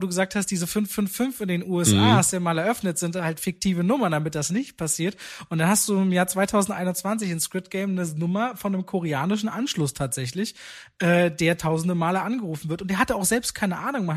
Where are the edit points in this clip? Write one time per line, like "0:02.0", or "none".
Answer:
none